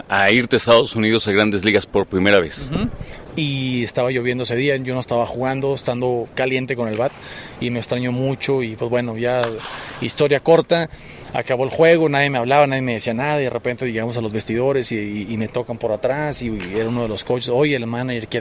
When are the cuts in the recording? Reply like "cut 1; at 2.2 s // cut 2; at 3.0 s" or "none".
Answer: cut 1; at 3.3 s